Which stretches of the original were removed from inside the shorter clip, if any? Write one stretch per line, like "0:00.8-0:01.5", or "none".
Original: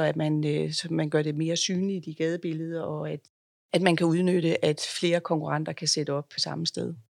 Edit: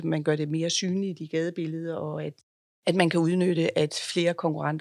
none